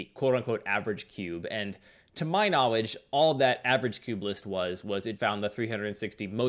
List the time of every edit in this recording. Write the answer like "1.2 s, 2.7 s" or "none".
5.2 s